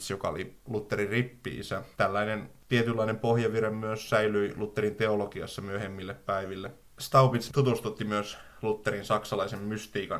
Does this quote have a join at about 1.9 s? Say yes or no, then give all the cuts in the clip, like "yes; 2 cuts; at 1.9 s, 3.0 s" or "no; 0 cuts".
yes; 1 cut; at 1.9 s